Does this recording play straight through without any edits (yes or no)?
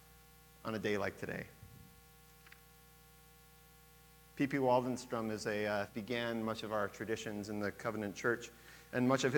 no